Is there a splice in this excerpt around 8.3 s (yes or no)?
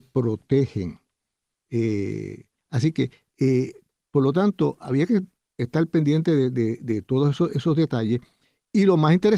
no